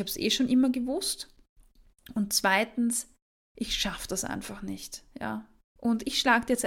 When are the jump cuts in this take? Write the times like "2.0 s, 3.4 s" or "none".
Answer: 5.6 s

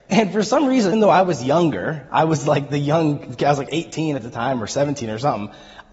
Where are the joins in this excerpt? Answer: 0.9 s

